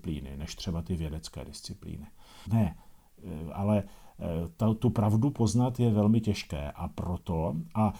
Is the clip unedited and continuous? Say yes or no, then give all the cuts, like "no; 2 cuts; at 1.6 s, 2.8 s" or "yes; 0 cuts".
no; 1 cut; at 2.5 s